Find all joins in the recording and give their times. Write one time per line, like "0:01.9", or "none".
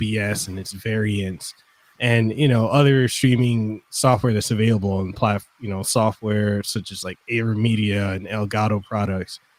none